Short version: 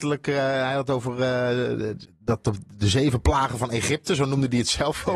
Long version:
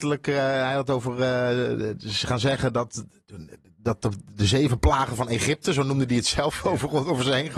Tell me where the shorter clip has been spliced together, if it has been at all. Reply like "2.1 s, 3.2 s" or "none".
2.0 s